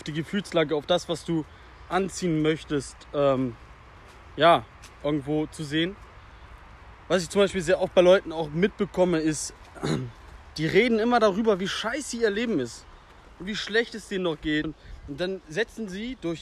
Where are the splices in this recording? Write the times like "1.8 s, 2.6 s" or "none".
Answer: 13.2 s, 14.6 s